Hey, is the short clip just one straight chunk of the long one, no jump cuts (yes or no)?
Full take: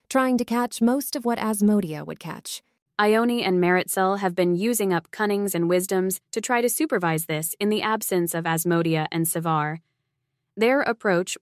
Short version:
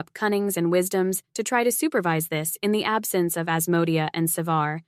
yes